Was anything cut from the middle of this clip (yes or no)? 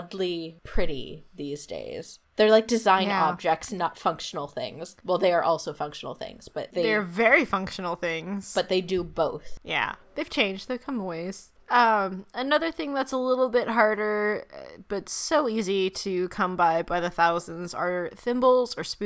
no